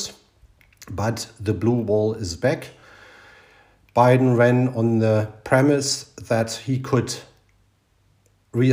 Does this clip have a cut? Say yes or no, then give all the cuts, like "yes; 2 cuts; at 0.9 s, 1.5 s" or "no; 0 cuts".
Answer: no; 0 cuts